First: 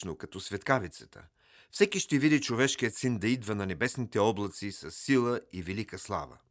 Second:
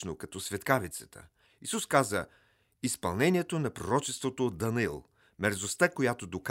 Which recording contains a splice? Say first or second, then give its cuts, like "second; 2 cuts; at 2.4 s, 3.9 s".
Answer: second; 1 cut; at 1.5 s